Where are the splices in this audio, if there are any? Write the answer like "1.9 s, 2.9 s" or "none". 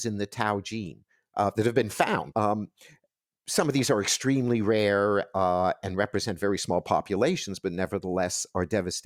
2.3 s